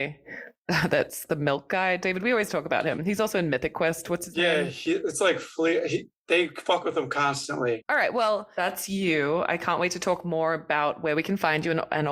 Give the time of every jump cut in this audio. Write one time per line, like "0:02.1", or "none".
0:07.8